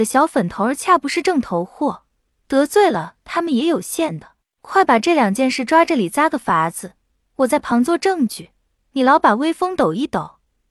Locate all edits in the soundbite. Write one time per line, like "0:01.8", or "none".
none